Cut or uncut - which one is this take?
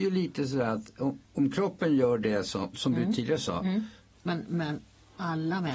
cut